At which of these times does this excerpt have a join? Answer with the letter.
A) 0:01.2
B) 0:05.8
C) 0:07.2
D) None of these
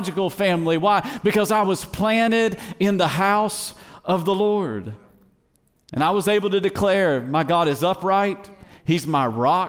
D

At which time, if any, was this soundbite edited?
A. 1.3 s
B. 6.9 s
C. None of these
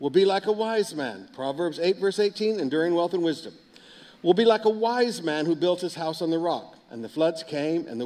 B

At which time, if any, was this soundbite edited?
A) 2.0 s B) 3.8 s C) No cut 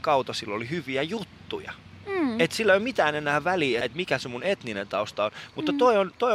B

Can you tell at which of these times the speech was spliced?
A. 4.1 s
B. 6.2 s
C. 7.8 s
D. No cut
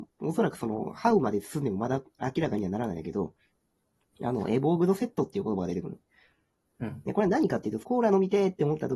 C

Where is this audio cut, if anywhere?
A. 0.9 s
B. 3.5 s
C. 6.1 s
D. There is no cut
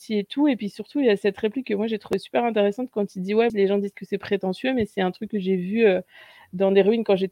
B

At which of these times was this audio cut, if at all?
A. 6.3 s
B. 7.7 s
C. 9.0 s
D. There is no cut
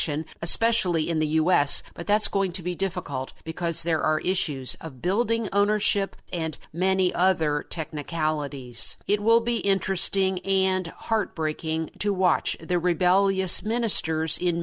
A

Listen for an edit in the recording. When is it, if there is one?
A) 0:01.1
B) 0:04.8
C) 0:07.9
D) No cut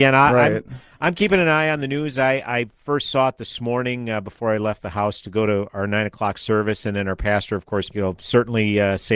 C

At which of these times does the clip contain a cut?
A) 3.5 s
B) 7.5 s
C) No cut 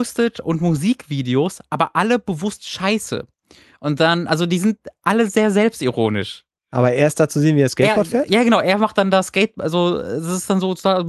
C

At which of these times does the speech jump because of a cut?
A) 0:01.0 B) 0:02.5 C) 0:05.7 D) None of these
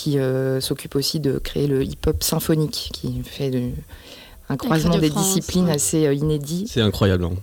D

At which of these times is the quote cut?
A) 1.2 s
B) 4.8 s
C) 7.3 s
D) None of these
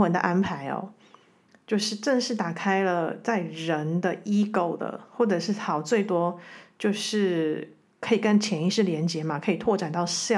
D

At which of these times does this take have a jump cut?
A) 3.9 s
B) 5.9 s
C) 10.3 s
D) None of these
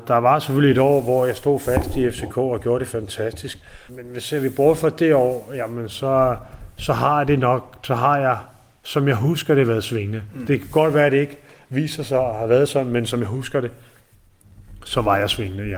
A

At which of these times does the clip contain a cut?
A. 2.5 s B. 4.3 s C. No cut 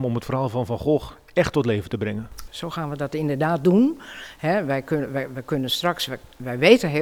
A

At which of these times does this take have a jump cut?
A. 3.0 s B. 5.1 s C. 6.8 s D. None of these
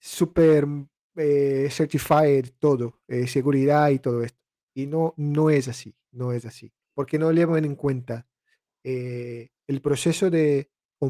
C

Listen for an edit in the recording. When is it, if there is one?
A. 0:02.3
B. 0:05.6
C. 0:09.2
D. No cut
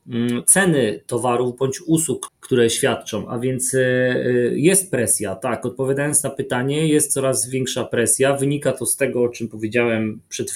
A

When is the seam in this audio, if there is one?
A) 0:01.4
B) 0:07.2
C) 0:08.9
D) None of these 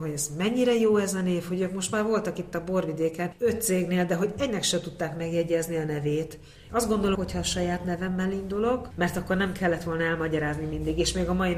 B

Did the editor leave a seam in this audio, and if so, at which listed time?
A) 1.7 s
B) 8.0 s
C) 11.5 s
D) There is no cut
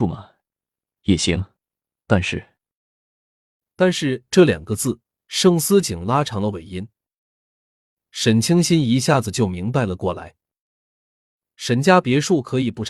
D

